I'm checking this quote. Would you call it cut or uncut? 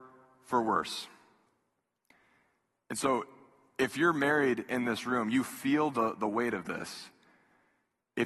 uncut